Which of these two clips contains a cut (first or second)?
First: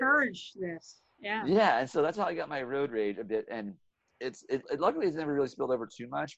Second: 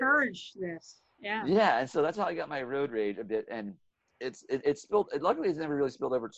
first